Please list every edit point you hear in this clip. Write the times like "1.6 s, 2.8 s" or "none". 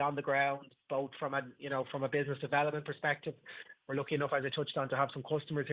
none